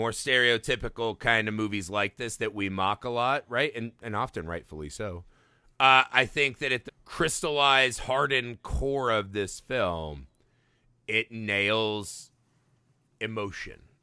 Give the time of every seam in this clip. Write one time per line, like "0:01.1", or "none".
0:06.9